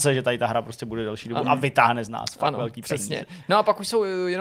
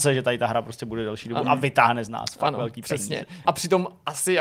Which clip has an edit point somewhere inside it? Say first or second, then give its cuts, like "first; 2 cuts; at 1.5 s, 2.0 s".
second; 1 cut; at 3.4 s